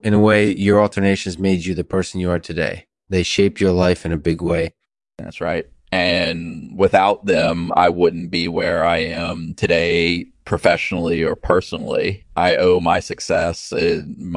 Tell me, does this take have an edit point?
no; 0 cuts

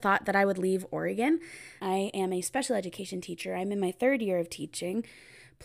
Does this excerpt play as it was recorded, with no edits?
no; 1 cut; at 1.8 s

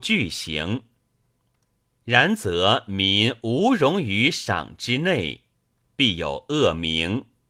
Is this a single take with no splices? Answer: no; 1 cut; at 5.9 s

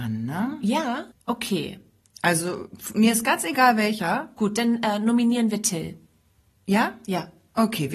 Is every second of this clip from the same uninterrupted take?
no; 1 cut; at 1.1 s

